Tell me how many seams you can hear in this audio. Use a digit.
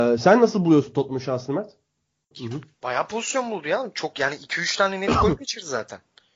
1